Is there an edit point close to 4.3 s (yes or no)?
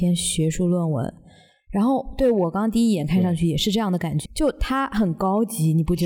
yes